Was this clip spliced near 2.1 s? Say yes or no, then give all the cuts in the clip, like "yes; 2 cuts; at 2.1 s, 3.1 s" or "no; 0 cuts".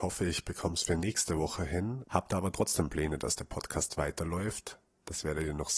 yes; 1 cut; at 2.1 s